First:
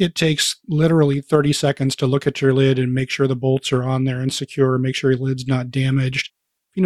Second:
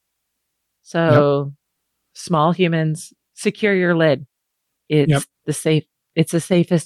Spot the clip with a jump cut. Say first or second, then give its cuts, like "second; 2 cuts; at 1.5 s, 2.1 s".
second; 1 cut; at 3.3 s